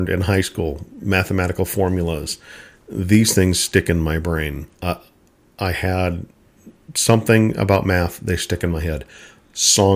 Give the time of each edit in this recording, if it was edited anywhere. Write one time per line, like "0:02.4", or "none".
none